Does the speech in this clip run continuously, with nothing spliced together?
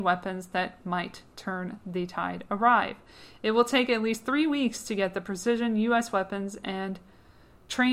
yes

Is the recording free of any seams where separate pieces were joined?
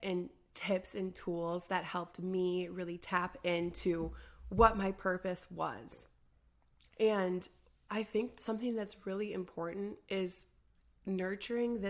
no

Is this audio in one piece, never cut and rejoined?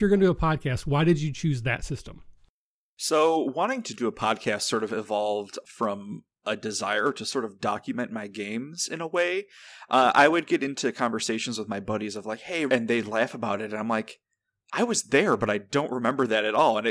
no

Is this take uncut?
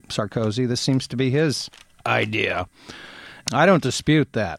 no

